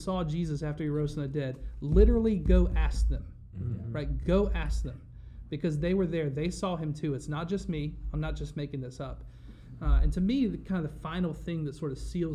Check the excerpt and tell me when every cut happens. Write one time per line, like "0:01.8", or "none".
none